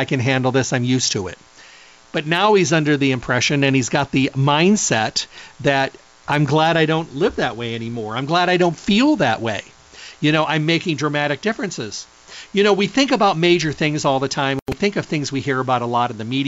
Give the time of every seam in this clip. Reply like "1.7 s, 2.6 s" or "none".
none